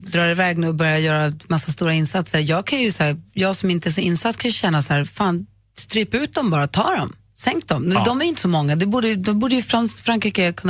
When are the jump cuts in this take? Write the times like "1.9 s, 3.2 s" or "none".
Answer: none